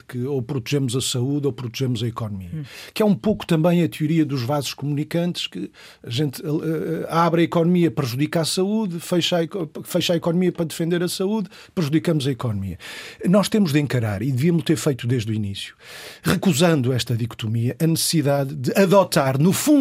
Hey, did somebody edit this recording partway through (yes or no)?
no